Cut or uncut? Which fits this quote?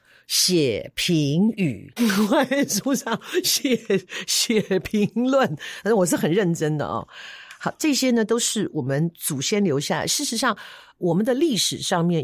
cut